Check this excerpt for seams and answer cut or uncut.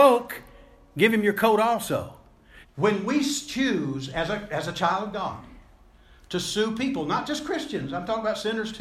cut